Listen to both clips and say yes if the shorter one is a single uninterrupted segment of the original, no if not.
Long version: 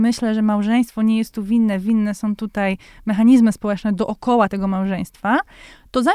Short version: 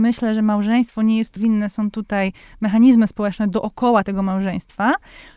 no